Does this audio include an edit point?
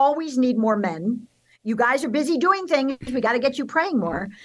no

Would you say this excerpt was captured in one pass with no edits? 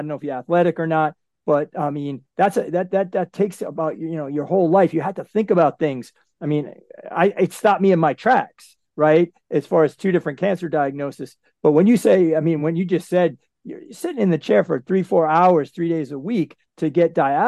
yes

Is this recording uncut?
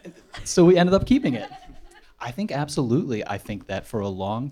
no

